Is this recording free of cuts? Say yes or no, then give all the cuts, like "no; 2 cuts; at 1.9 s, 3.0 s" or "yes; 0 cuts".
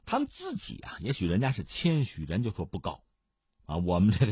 yes; 0 cuts